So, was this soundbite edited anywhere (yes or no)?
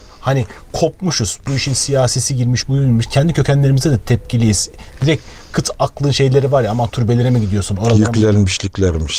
yes